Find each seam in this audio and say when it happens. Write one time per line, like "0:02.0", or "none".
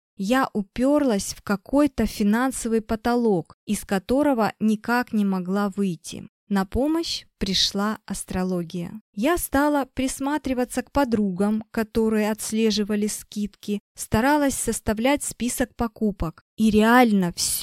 0:09.1